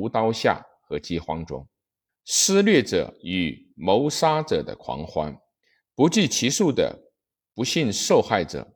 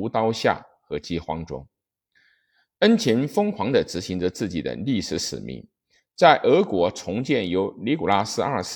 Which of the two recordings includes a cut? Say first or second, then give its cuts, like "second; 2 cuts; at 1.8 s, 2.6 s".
first; 1 cut; at 2.1 s